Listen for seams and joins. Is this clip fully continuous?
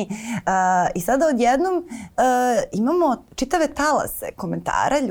yes; 0 cuts

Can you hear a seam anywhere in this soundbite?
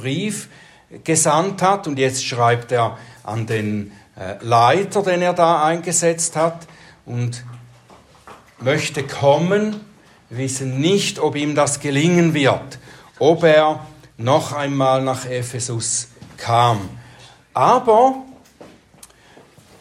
no; 0 cuts

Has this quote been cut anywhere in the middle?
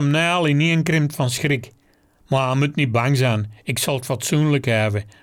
no; 0 cuts

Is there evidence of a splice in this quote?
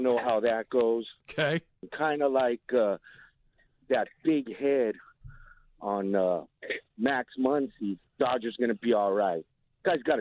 yes; 3 cuts; at 3.8 s, 6.9 s, 8.1 s

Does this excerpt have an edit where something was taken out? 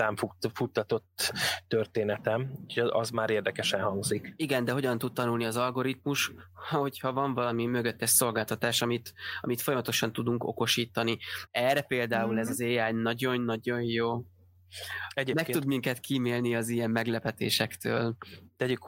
yes; 1 cut; at 11.5 s

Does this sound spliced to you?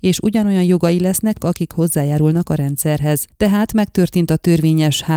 yes; 2 cuts; at 1.4 s, 3.3 s

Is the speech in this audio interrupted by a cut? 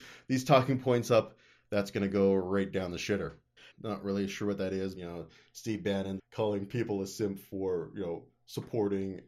yes; 3 cuts; at 3.7 s, 5.0 s, 6.2 s

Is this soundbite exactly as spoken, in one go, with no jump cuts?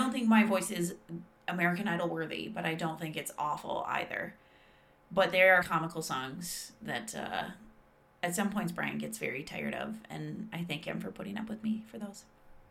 no; 1 cut; at 5.6 s

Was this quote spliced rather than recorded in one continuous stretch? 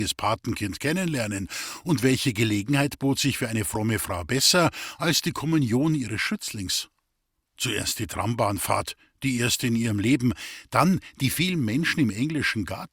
yes; 1 cut; at 7.4 s

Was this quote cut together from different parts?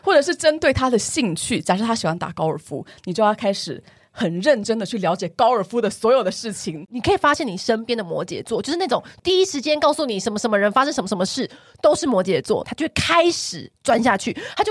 yes; 2 cuts; at 6.8 s, 12.6 s

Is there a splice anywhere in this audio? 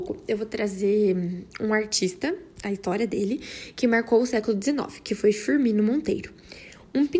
no; 0 cuts

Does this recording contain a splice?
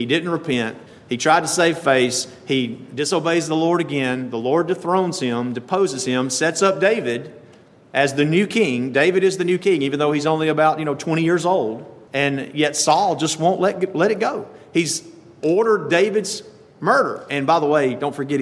no; 0 cuts

